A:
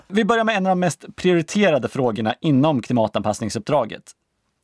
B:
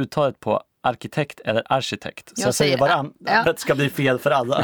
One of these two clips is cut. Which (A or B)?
B